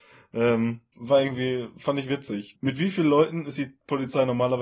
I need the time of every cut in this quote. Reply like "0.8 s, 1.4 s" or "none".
0.9 s, 2.5 s